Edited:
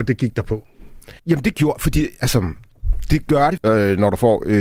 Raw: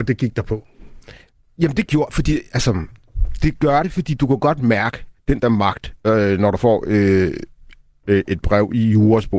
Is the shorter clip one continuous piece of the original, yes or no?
no